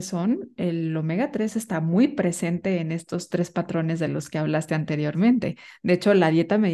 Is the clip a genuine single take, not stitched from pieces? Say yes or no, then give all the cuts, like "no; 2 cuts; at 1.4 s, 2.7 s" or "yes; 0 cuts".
yes; 0 cuts